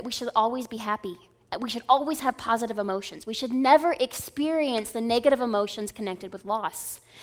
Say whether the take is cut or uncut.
uncut